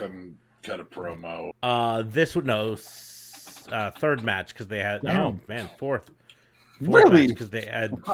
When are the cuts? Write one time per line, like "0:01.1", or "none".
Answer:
0:01.5